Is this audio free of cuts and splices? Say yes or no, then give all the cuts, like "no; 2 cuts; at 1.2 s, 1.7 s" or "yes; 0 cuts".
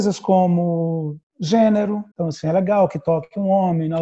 no; 1 cut; at 2.1 s